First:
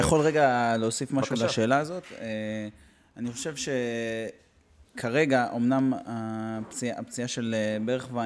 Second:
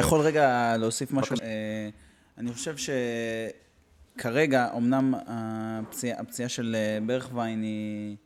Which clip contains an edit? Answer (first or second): second